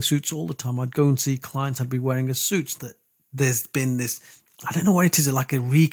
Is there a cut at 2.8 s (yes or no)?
yes